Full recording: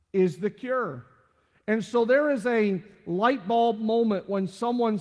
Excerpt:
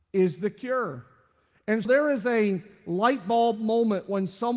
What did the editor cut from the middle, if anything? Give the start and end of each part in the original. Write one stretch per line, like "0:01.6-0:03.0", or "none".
0:01.9-0:02.1